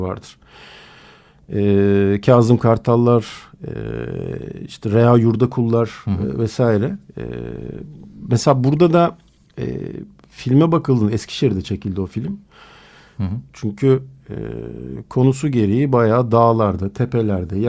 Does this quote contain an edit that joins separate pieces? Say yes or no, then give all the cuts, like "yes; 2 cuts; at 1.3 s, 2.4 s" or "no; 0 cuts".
yes; 1 cut; at 13.2 s